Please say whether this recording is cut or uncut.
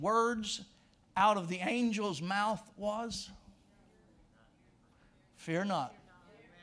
uncut